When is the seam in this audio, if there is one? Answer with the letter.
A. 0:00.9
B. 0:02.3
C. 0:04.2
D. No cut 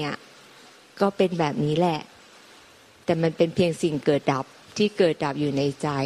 C